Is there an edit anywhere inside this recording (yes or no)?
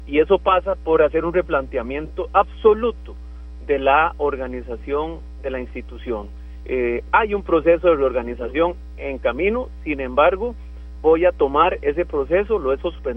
yes